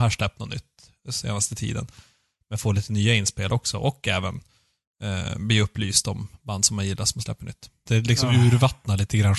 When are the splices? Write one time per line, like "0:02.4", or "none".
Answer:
0:07.9